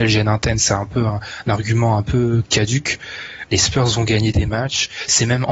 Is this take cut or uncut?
cut